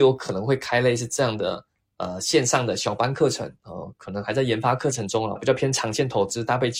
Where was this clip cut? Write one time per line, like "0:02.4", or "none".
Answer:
0:05.4